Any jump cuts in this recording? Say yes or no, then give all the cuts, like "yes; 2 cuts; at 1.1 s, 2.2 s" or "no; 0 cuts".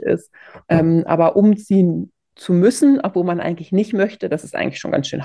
no; 0 cuts